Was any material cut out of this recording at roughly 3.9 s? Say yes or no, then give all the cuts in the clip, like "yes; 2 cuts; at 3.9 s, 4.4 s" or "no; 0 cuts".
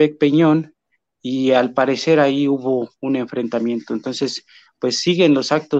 no; 0 cuts